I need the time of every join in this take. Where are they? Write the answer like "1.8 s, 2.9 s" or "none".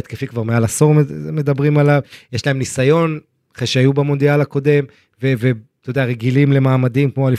none

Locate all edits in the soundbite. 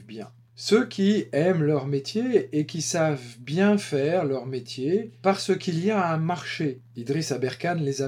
none

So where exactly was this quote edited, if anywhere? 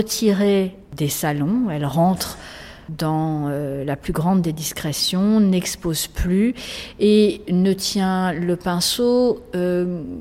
none

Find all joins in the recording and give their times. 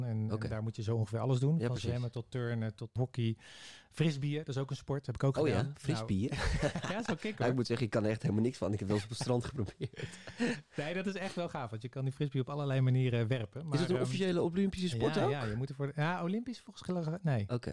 3.0 s

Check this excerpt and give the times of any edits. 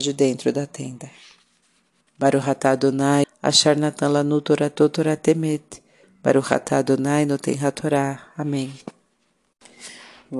2.1 s, 3.2 s, 6.0 s

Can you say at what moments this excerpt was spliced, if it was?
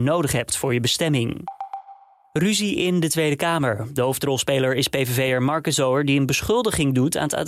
none

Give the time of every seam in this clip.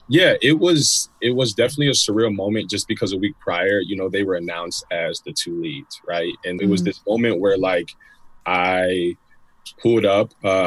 6.6 s

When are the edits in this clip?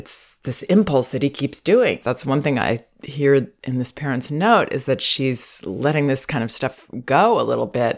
2.0 s

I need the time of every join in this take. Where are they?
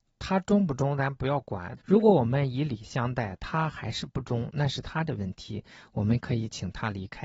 1.8 s

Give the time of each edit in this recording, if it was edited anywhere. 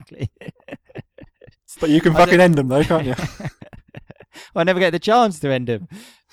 1.8 s

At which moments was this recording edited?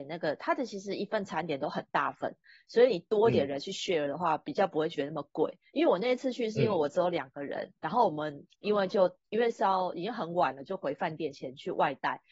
none

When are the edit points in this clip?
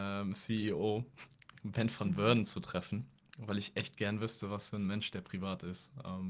none

